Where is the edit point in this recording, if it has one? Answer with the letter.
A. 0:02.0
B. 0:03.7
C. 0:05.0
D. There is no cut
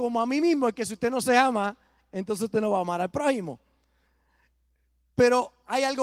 D